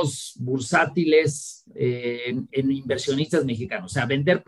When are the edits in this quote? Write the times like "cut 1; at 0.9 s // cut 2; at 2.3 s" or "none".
cut 1; at 2.5 s